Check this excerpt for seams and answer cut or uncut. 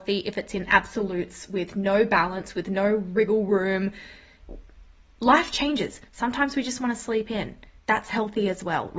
uncut